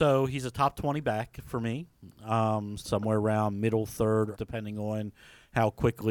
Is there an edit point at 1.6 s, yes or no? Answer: no